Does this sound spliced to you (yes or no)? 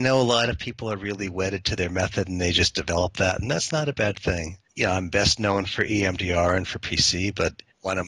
yes